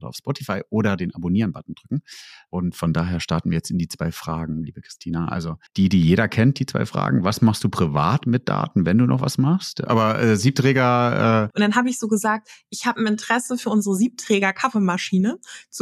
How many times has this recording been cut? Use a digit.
3